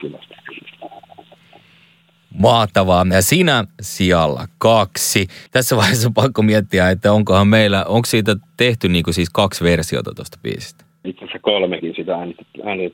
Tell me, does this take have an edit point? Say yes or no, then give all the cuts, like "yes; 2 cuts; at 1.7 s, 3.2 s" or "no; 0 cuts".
yes; 2 cuts; at 5.5 s, 11.0 s